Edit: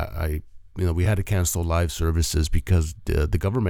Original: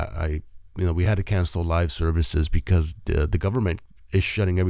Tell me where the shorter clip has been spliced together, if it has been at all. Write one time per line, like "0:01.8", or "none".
none